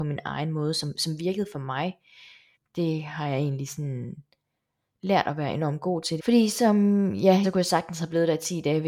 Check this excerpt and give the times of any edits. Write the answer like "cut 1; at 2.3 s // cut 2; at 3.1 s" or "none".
cut 1; at 2.5 s // cut 2; at 6.2 s // cut 3; at 7.4 s